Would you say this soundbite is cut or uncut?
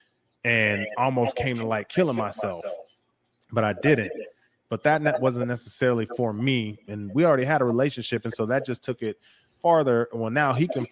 cut